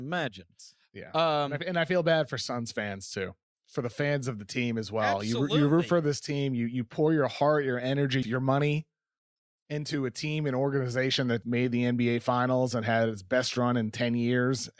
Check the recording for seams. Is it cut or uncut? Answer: cut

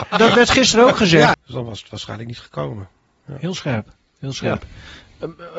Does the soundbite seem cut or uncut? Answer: cut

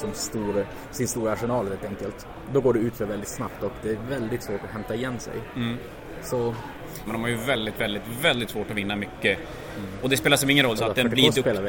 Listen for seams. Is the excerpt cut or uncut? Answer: cut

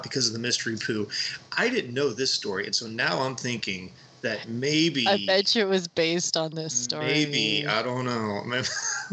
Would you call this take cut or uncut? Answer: uncut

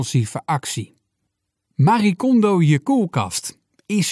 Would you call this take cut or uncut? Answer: uncut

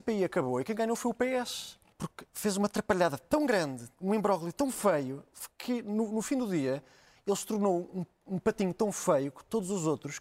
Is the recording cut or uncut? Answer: cut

